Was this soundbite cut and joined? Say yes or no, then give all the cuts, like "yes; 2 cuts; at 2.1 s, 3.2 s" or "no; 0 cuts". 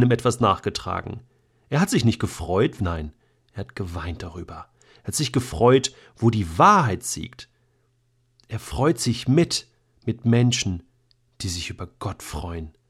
yes; 1 cut; at 2.8 s